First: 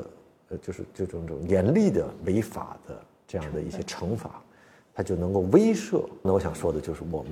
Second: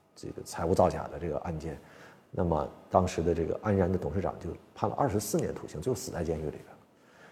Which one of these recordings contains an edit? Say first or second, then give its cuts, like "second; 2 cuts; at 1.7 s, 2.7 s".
first; 1 cut; at 6.2 s